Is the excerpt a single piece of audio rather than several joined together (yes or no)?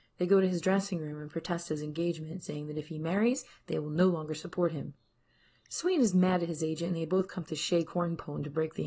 yes